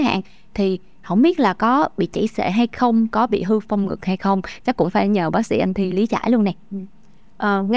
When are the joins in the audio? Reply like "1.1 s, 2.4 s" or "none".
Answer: 4.6 s